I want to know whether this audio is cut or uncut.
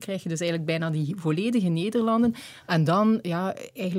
cut